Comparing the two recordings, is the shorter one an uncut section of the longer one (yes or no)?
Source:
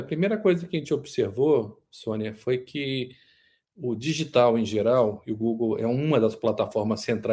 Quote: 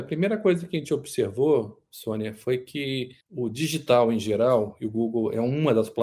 no